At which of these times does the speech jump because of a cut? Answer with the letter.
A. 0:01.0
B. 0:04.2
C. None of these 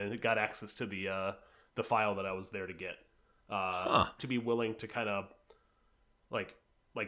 B